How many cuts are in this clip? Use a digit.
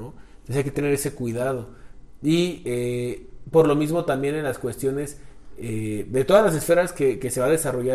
0